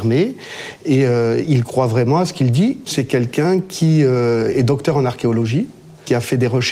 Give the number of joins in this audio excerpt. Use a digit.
1